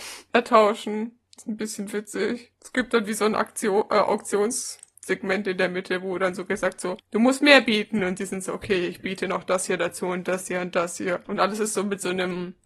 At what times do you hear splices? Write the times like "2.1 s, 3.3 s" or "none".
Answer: none